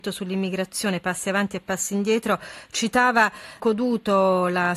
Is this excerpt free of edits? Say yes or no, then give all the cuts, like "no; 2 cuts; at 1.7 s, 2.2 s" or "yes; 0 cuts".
no; 1 cut; at 3.6 s